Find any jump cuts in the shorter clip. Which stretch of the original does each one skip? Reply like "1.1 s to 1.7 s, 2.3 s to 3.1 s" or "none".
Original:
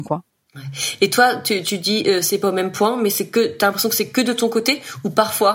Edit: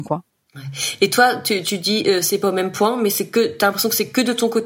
none